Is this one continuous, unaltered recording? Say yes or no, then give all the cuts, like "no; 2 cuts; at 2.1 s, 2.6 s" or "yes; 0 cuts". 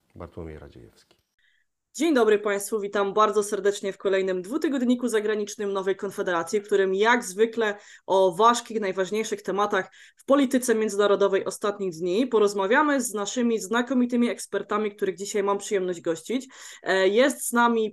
yes; 0 cuts